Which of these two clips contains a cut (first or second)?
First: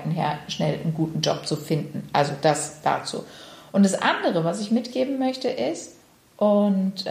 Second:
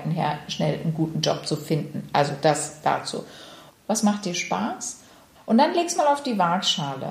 second